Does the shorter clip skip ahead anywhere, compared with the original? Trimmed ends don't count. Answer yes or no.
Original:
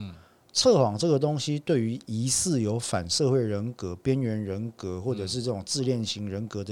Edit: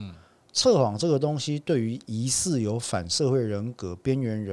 no